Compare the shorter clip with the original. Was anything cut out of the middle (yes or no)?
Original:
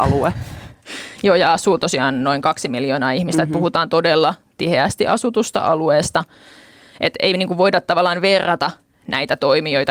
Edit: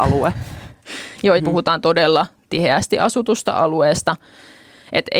yes